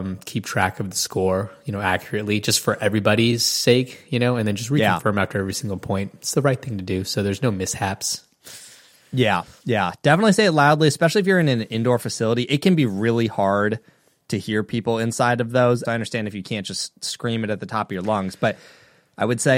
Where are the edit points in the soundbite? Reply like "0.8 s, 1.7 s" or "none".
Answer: 15.8 s